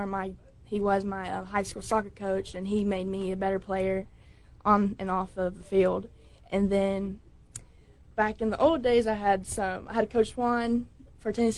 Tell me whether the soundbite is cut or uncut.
uncut